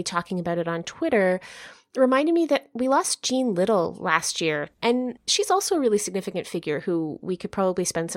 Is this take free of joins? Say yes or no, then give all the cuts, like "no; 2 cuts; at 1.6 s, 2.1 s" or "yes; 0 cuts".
no; 1 cut; at 4.8 s